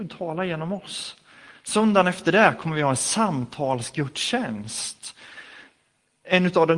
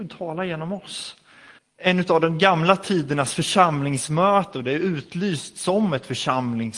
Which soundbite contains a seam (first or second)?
second